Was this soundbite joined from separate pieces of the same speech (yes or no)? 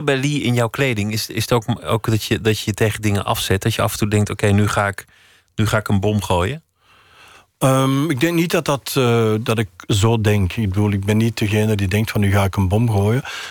no